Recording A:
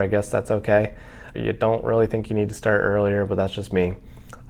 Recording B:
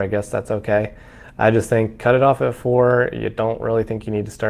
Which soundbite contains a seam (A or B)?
A